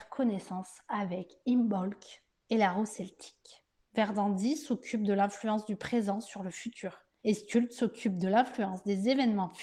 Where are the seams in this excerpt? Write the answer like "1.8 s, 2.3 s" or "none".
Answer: 3.8 s